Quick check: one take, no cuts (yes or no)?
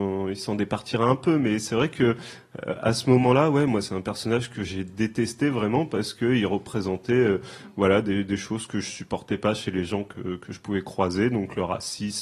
yes